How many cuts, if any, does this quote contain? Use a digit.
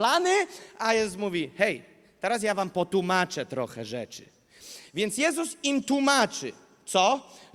0